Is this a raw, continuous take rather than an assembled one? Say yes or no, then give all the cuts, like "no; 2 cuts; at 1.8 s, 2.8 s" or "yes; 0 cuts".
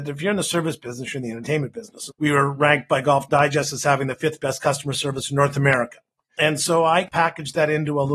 no; 2 cuts; at 2.1 s, 6.3 s